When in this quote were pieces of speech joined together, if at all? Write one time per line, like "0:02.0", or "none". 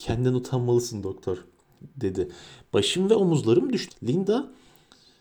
0:03.9

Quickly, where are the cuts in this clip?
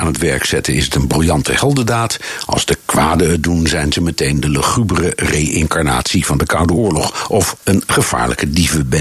0:07.6

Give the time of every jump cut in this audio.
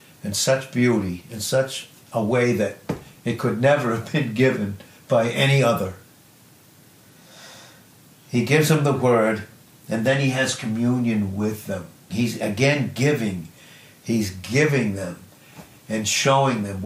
0:12.1

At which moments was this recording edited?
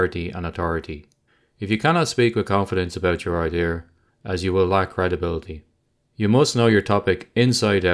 0:04.1

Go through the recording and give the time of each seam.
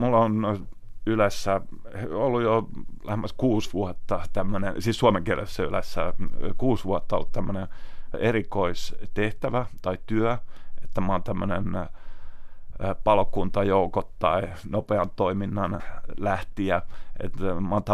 none

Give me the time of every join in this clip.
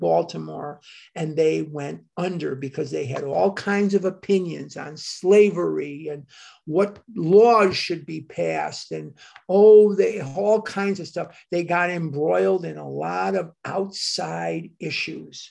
none

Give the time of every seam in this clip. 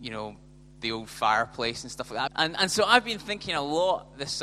0:02.3

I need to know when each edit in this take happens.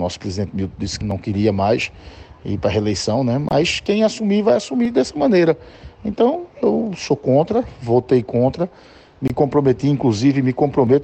0:01.0

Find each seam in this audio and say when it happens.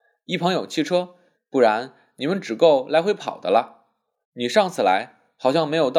0:01.3
0:04.2

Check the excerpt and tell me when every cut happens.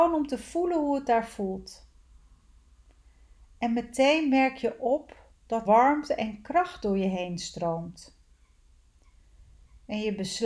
0:05.7

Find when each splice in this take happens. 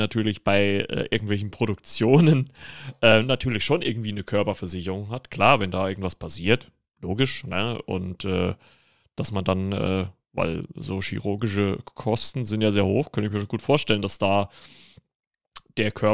none

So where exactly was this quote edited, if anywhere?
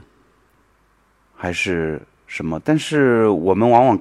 none

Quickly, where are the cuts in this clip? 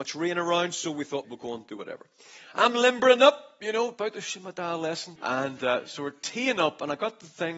0:01.2
0:05.2

